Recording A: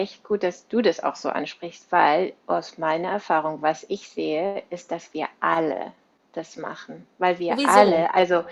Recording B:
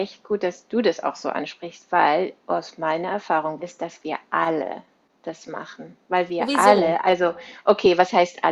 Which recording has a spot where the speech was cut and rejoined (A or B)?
B